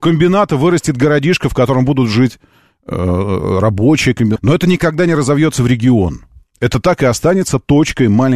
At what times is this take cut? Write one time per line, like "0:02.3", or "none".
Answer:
0:04.4